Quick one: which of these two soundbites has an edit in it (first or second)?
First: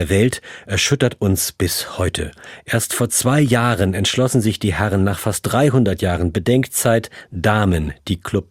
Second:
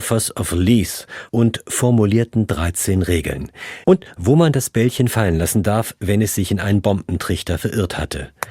second